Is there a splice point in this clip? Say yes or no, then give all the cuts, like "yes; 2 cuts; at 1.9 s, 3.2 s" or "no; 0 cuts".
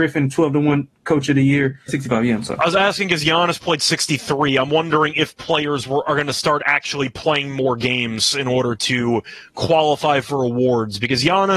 yes; 1 cut; at 1.9 s